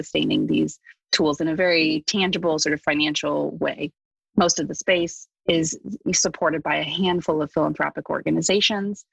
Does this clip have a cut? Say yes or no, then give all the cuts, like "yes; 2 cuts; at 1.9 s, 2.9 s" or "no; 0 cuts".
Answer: yes; 1 cut; at 5.3 s